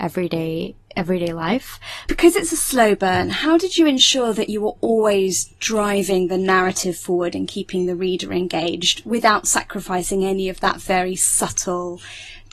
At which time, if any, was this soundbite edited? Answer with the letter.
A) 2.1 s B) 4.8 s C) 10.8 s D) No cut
A